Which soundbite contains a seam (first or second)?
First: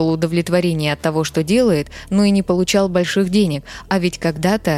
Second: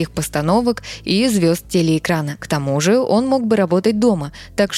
second